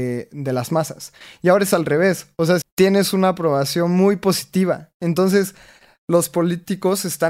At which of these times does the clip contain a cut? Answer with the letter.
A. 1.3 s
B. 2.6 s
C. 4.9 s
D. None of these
B